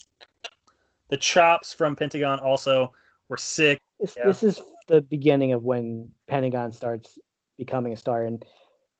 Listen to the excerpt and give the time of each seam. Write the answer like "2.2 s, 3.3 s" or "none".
3.8 s, 6.2 s